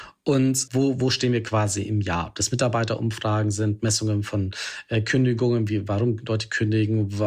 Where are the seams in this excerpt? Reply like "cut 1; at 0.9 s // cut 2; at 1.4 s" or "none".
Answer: none